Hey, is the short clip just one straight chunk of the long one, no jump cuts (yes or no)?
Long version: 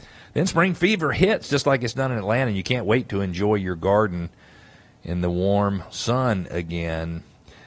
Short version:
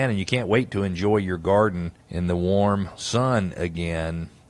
no